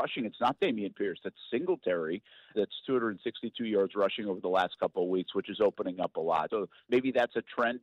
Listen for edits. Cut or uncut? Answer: cut